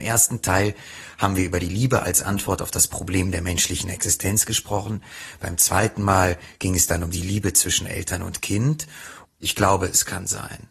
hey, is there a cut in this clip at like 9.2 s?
yes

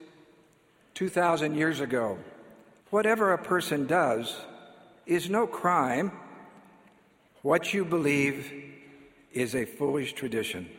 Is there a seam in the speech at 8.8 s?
no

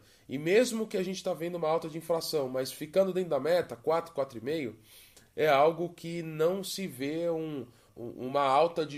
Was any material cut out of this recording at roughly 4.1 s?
no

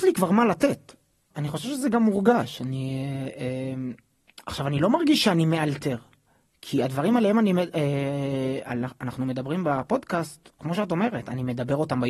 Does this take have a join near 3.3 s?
no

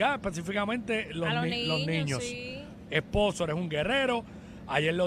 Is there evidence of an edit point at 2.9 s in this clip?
yes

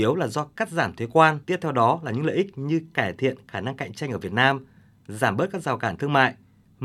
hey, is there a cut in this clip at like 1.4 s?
yes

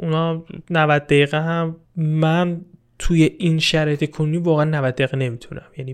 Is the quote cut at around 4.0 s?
no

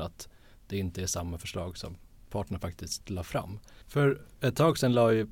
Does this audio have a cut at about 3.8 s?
yes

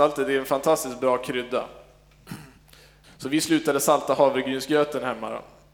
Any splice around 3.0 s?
yes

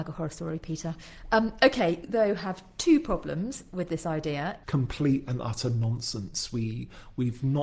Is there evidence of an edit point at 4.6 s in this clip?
yes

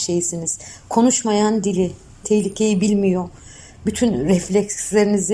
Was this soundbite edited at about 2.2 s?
yes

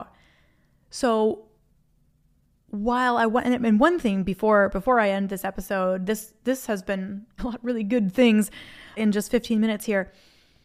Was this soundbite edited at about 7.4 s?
yes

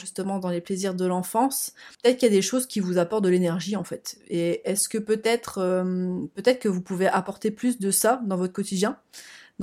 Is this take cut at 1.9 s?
yes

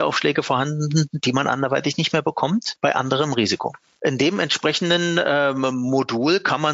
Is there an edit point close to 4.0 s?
yes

